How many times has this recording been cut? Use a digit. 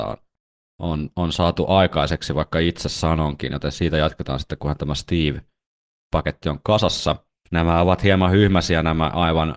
1